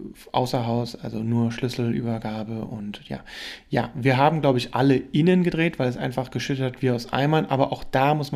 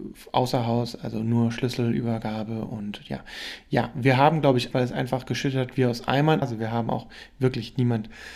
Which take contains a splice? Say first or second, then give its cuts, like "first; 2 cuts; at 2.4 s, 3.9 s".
second; 2 cuts; at 4.7 s, 6.4 s